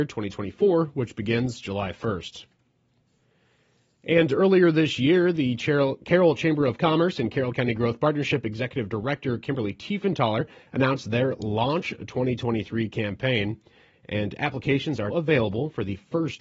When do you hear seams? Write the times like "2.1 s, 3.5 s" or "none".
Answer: 15.1 s